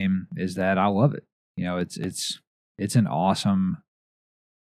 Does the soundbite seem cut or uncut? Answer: uncut